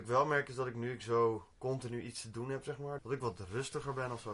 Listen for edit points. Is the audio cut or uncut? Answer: cut